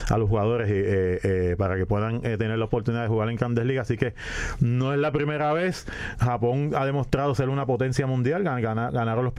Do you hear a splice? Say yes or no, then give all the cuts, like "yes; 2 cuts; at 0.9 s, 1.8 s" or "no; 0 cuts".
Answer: no; 0 cuts